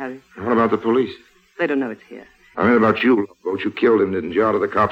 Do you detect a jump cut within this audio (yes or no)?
yes